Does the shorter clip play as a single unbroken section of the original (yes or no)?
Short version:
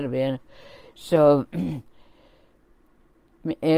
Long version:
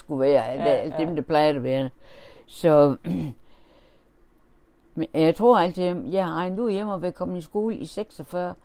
yes